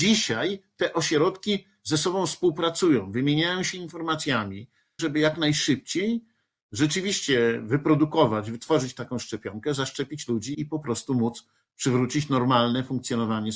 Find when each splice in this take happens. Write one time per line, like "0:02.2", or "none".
0:05.0
0:10.5

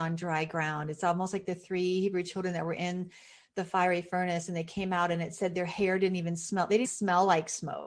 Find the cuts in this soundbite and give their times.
0:06.8

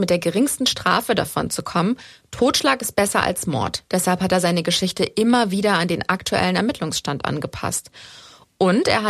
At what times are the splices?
none

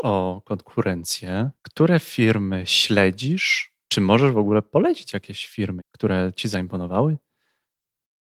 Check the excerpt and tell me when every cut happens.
0:01.6
0:03.8
0:05.8

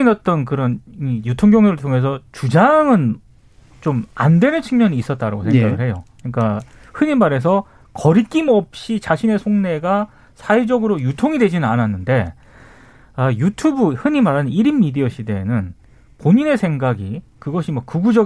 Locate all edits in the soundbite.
none

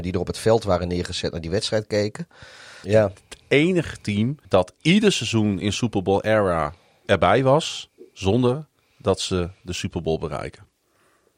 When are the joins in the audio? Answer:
0:02.8
0:04.5

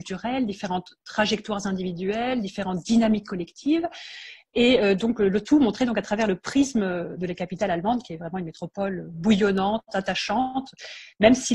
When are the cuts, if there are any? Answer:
none

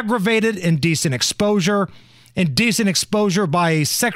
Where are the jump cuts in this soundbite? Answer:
none

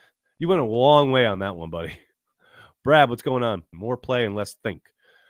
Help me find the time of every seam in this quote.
0:03.7

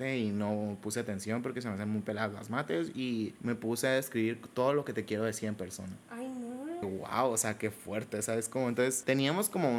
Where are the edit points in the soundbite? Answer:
0:06.8

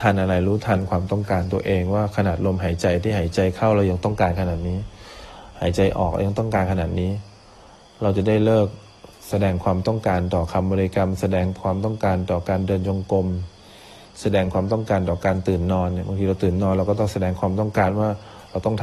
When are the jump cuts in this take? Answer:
none

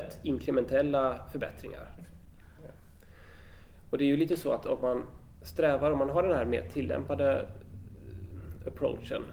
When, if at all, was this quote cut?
0:02.0

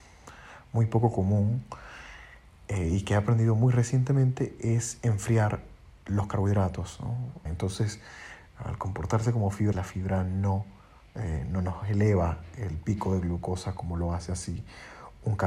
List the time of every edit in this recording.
0:07.5
0:09.7

